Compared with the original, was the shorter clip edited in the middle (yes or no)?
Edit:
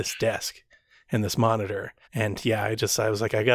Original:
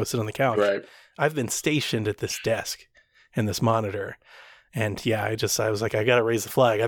yes